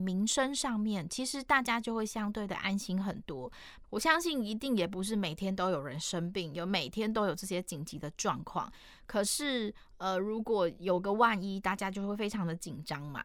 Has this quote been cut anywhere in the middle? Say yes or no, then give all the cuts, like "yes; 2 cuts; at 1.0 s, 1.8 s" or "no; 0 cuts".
yes; 1 cut; at 3.8 s